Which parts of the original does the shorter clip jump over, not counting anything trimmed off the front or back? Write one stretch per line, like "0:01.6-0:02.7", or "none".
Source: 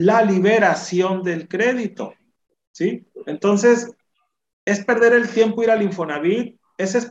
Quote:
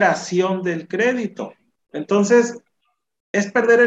0:02.5-0:03.2